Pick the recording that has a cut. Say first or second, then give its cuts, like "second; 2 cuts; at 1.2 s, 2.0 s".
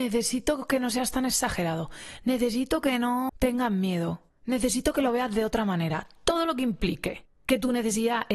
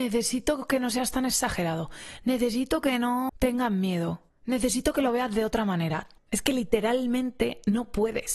second; 1 cut; at 6.2 s